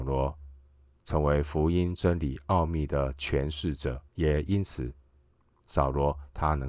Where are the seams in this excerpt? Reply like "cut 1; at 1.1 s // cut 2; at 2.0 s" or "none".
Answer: cut 1; at 4.1 s